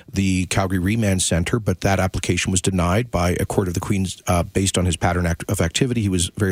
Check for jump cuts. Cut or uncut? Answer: cut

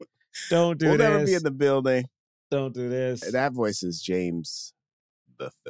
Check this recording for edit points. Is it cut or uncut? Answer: uncut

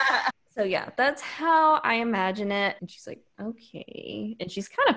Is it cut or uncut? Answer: cut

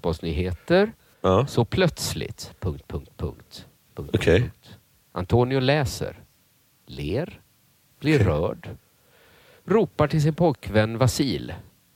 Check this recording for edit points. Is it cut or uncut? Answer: cut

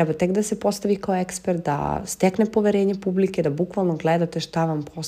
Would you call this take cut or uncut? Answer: uncut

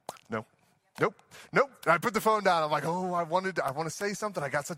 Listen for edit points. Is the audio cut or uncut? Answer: uncut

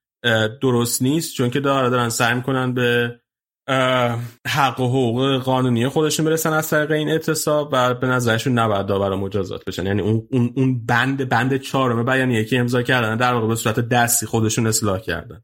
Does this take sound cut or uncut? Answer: cut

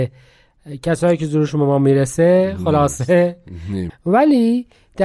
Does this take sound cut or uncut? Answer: cut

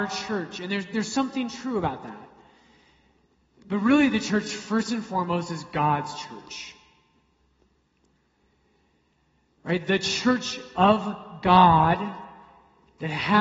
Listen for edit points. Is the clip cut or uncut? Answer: uncut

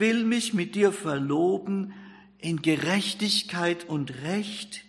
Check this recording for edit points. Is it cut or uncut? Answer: uncut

